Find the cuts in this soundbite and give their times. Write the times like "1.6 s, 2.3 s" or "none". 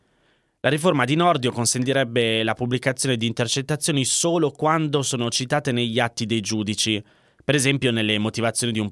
none